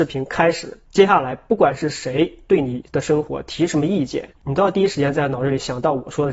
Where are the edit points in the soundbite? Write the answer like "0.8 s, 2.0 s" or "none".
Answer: 4.4 s